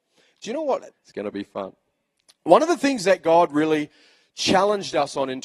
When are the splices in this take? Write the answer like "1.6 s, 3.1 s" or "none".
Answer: 0.9 s